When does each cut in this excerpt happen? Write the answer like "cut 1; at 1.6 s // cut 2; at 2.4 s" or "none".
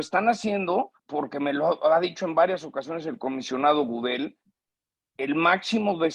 cut 1; at 1.0 s